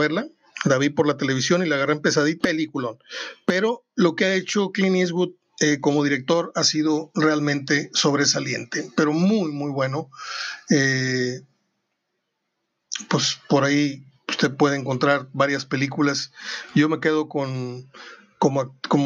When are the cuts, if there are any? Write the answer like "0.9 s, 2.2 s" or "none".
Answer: 2.4 s